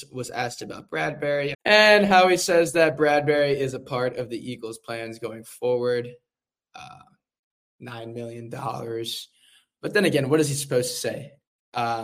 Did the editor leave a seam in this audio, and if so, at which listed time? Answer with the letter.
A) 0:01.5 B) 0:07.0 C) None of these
A